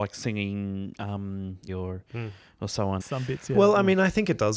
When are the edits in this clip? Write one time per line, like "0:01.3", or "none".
0:01.7
0:03.0